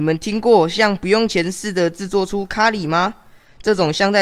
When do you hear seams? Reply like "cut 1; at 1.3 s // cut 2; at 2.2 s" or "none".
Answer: none